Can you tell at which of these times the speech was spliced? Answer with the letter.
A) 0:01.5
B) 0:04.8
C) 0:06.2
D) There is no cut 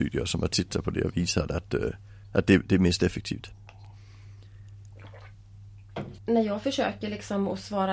C